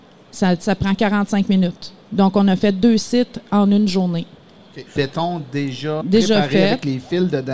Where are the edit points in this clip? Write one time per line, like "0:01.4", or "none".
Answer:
0:05.0
0:06.0